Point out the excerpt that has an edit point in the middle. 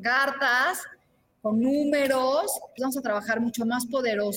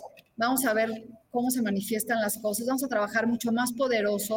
first; 1 cut; at 2.8 s

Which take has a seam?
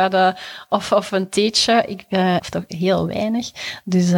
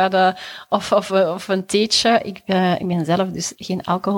first; 2 cuts; at 1.1 s, 2.4 s

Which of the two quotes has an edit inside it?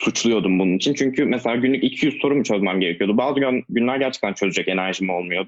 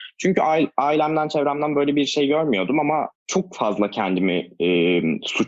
second; 1 cut; at 3.2 s

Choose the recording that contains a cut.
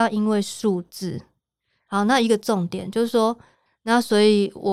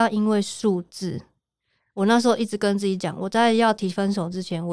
first; 2 cuts; at 1.9 s, 3.7 s

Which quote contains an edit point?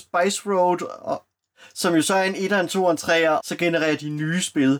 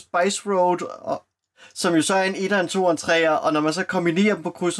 first; 1 cut; at 3.4 s

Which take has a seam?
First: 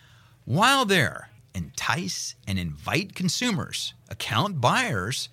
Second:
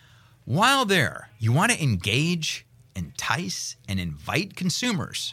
first; 1 cut; at 1.4 s

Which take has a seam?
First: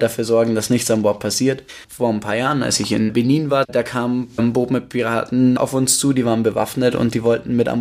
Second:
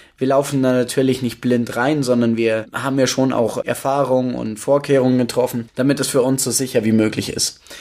first; 2 cuts; at 1.8 s, 5.6 s

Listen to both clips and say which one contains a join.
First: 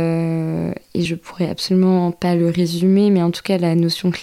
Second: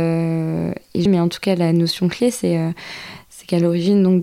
second; 1 cut; at 1.1 s

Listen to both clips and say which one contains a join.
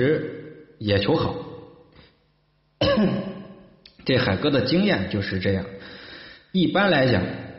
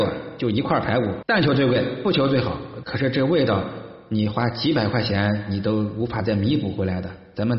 second; 2 cuts; at 1.2 s, 2.8 s

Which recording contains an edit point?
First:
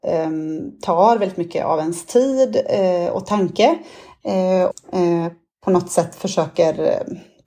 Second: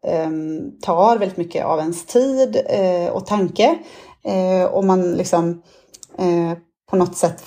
first; 1 cut; at 4.7 s

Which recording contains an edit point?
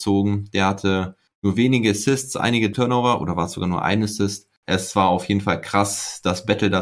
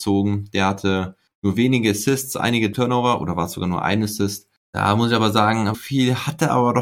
second; 2 cuts; at 4.6 s, 5.7 s

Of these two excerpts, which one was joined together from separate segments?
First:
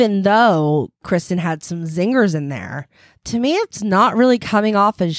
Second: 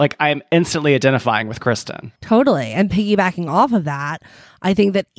second; 1 cut; at 2.2 s

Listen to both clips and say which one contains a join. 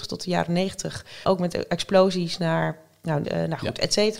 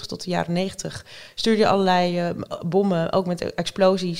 first; 2 cuts; at 1.2 s, 3.2 s

